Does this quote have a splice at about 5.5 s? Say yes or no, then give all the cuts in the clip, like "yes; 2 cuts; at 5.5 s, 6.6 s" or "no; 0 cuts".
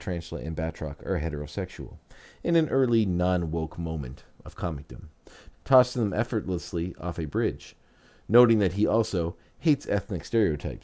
yes; 1 cut; at 5.5 s